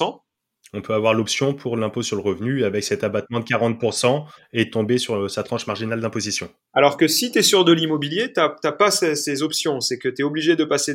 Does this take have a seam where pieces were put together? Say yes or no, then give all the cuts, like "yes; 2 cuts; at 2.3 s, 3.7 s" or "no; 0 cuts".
no; 0 cuts